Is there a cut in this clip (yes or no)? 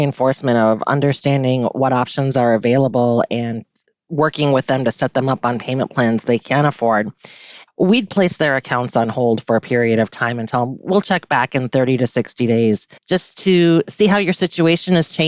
yes